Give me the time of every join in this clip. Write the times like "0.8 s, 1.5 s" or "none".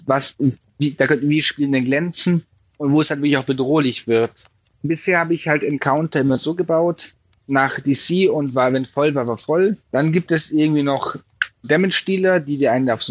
9.8 s, 11.6 s